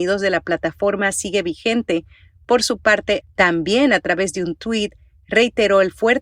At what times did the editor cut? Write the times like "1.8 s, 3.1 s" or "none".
3.2 s

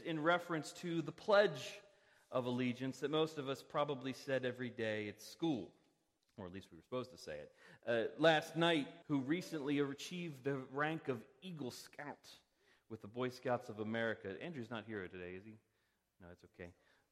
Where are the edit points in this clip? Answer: 9.0 s

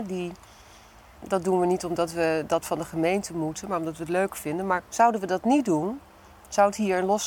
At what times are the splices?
1.2 s, 4.9 s

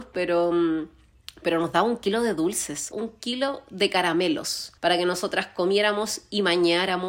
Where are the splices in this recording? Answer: 2.9 s, 4.8 s

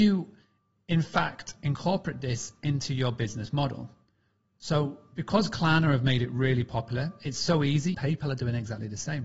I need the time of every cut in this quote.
7.9 s

